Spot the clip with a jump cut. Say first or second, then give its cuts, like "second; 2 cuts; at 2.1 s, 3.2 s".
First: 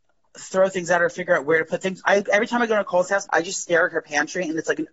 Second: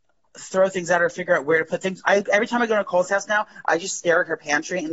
first; 1 cut; at 3.3 s